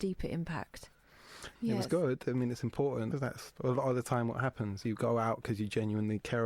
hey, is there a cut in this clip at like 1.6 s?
yes; 2 cuts; at 1.6 s, 3.1 s

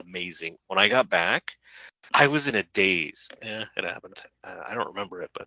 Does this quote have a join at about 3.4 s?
yes; 1 cut; at 3.4 s

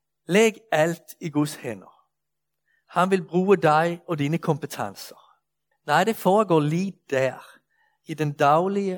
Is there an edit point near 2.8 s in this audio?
no; 1 cut; at 5.7 s

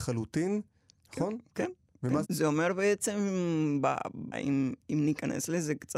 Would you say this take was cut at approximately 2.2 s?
yes; 2 cuts; at 2.2 s, 4.3 s

